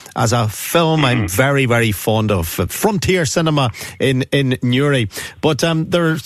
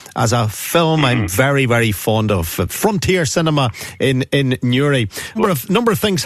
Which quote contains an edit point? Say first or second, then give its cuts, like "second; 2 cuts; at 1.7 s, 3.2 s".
second; 1 cut; at 5.4 s